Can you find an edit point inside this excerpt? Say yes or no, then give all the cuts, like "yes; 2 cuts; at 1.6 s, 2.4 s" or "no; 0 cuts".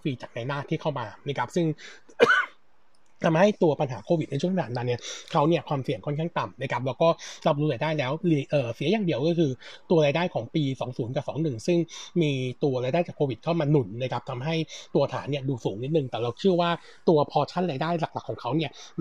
no; 0 cuts